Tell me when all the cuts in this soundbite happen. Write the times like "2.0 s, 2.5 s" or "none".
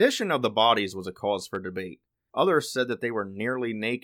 2.3 s